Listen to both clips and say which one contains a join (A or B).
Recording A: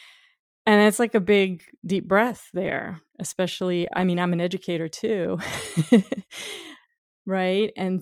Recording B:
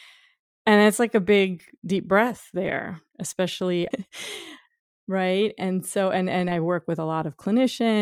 B